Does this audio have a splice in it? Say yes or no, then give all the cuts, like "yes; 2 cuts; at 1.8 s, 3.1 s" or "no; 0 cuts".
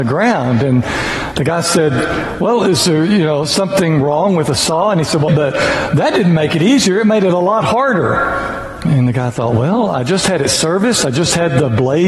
yes; 1 cut; at 5.3 s